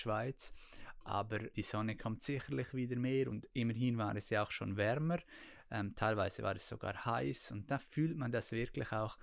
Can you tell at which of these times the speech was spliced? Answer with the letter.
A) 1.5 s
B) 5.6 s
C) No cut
A